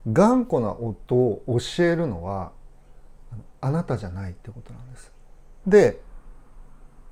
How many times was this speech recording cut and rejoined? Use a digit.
1